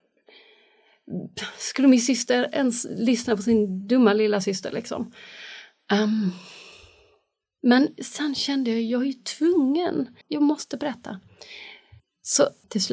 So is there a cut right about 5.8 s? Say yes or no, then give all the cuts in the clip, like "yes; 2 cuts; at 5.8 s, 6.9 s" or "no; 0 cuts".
no; 1 cut; at 10.2 s